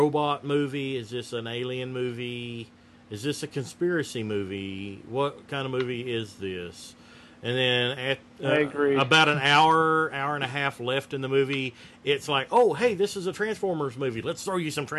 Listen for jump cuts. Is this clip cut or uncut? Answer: uncut